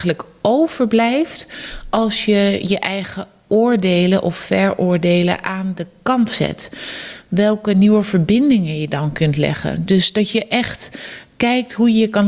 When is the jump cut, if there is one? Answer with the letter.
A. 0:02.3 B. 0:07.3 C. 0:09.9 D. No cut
D